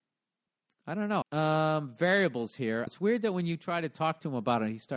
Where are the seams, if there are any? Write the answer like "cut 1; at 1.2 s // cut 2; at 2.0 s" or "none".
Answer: cut 1; at 1.2 s // cut 2; at 2.9 s